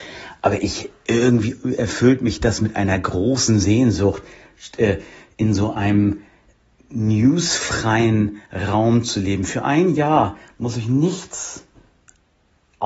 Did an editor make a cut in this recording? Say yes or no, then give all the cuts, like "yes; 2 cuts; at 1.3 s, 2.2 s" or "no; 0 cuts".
no; 0 cuts